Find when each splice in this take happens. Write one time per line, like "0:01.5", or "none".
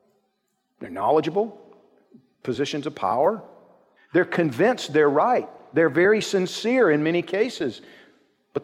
0:04.0